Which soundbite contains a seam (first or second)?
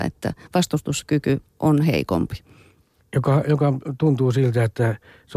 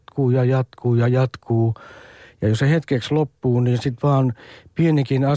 first